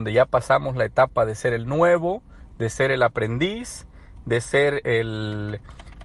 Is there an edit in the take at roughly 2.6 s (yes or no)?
no